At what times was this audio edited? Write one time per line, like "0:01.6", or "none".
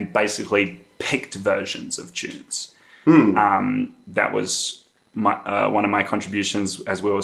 none